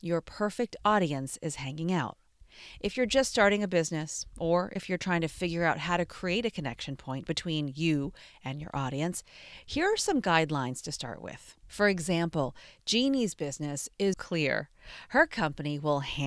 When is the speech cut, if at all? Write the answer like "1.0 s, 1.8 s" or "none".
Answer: 11.6 s, 14.1 s